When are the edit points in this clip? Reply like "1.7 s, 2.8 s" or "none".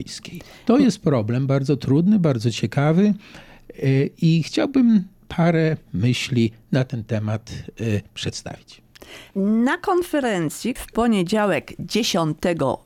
9.3 s, 10.8 s